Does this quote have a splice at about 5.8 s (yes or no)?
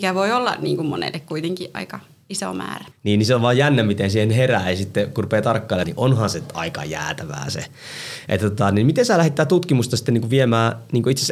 yes